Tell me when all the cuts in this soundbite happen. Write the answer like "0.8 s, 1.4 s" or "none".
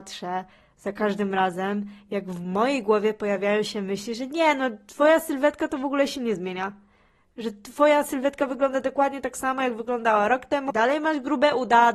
10.7 s